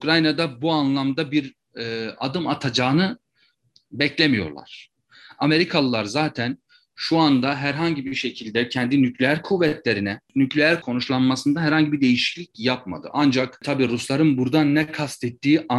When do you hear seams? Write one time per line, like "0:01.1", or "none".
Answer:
none